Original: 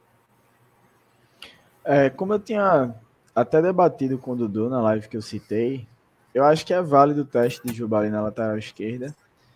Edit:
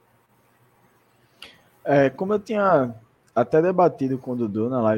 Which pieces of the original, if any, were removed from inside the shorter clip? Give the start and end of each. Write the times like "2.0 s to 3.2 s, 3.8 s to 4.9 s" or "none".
none